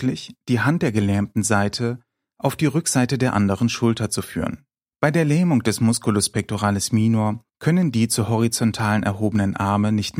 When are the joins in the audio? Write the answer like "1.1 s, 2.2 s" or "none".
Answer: 4.9 s, 7.5 s